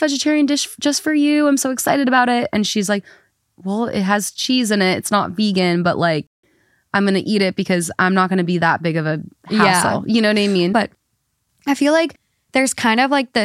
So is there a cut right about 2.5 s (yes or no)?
no